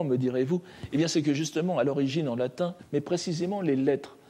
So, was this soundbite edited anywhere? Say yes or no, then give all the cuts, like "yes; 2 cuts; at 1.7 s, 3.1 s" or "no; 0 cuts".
yes; 1 cut; at 2.8 s